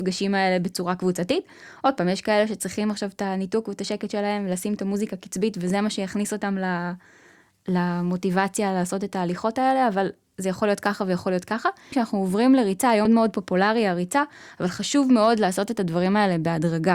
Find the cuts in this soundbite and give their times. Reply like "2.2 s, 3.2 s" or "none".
11.9 s, 13.1 s